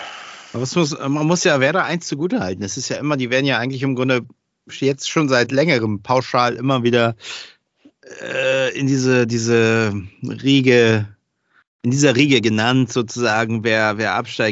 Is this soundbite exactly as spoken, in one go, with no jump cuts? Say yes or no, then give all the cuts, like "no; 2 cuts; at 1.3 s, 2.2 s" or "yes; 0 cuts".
yes; 0 cuts